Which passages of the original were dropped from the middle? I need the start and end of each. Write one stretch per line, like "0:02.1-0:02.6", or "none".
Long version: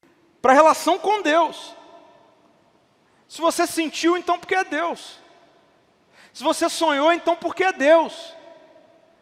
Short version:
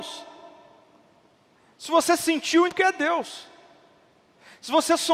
0:04.2-0:04.4